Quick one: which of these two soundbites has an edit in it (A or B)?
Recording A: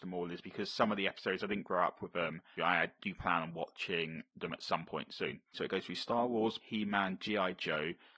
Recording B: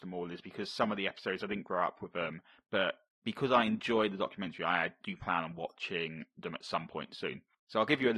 A